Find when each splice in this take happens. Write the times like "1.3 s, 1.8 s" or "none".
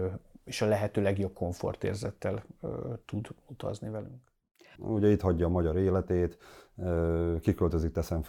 4.7 s